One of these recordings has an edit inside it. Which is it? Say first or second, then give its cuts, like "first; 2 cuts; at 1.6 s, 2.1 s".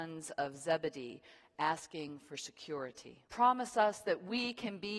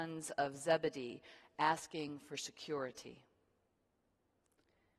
first; 1 cut; at 3.3 s